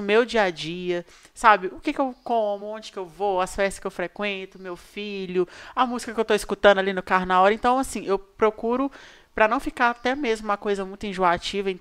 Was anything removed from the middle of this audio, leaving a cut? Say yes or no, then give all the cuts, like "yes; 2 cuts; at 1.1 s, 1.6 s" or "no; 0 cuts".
no; 0 cuts